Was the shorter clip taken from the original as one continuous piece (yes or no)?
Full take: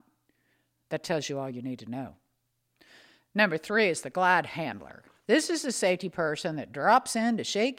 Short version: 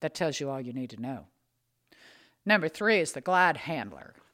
yes